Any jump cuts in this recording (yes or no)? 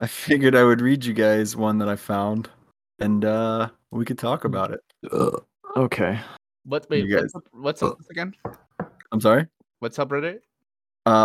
yes